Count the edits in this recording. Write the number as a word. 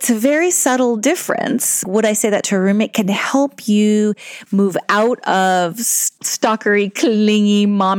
one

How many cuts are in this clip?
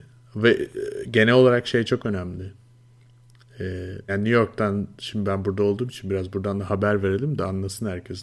one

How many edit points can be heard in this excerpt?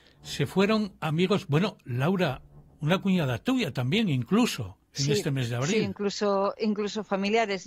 zero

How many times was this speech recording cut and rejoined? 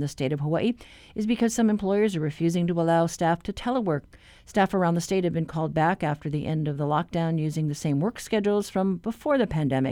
zero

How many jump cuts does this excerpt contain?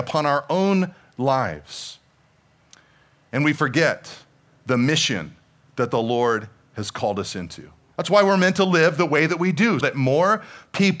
two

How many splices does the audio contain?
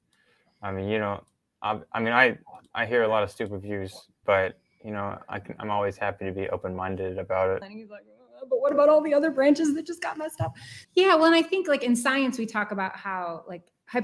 three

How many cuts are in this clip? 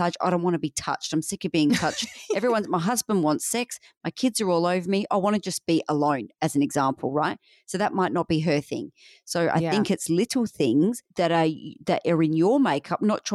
one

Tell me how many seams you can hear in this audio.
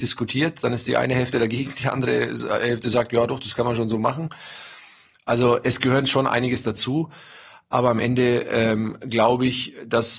zero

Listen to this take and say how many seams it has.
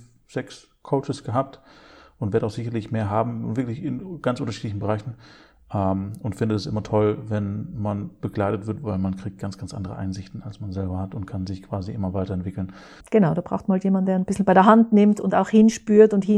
one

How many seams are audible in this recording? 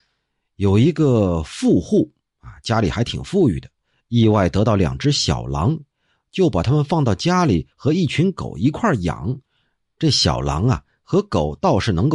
zero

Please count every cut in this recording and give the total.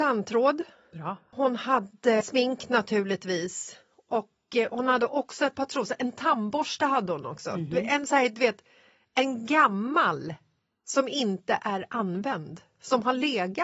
one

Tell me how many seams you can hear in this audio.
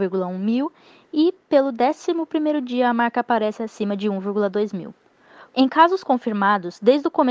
one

